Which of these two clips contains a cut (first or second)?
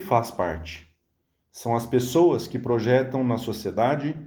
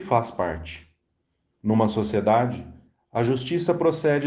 first